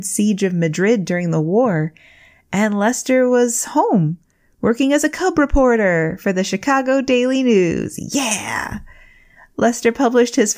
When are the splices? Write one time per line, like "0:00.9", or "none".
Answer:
none

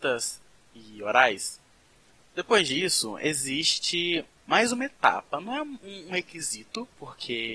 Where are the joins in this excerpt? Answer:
none

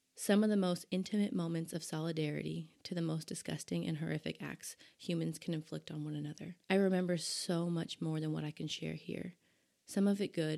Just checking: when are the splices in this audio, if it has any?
0:06.6

